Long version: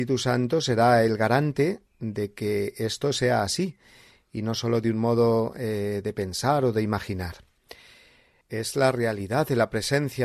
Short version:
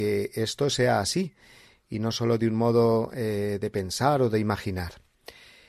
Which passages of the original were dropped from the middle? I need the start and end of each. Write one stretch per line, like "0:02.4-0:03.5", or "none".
none